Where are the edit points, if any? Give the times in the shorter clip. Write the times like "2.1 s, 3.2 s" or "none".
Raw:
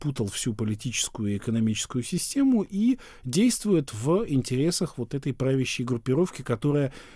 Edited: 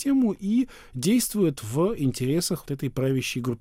2.6 s

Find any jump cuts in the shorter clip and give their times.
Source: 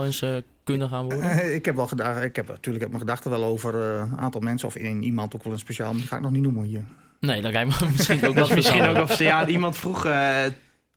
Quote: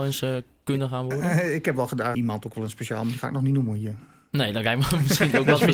2.1 s

